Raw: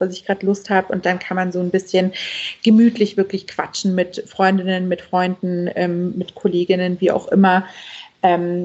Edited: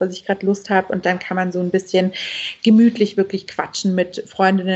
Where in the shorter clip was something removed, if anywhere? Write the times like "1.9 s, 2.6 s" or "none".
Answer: none